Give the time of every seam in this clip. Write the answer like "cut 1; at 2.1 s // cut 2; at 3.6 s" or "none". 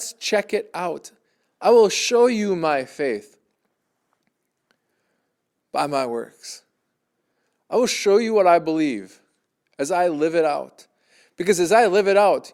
none